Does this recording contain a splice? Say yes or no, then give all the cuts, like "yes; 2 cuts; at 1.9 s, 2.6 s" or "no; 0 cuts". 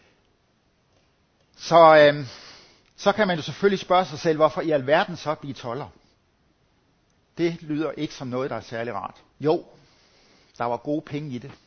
yes; 1 cut; at 9.3 s